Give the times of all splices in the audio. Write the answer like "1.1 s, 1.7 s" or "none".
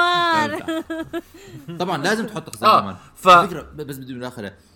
none